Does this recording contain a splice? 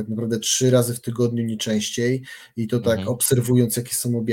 no; 0 cuts

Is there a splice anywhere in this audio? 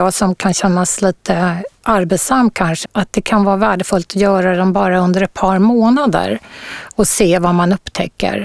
yes; 1 cut; at 2.8 s

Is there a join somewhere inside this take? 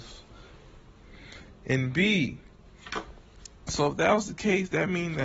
no; 0 cuts

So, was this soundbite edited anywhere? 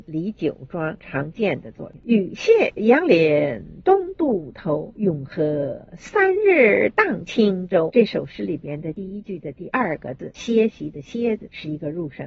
yes; 1 cut; at 7.9 s

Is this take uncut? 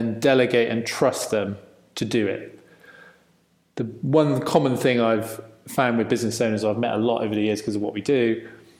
yes; 0 cuts

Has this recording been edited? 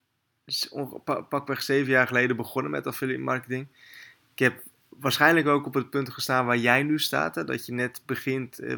no; 0 cuts

